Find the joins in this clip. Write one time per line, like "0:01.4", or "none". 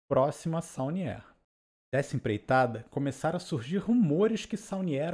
0:01.8